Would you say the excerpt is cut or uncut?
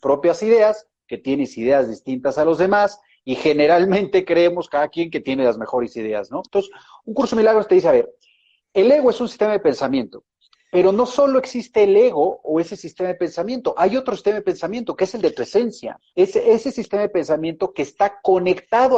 cut